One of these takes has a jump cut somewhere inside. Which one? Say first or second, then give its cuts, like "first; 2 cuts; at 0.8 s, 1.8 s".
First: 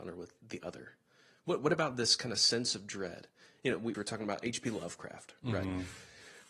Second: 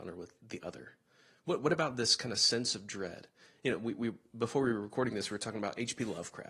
first; 1 cut; at 3.9 s